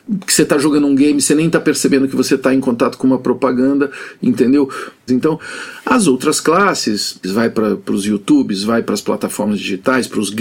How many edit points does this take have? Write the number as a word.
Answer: two